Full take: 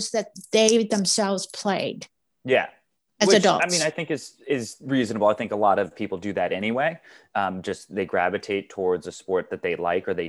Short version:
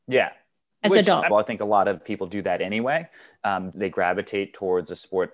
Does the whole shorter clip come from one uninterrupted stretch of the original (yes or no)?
no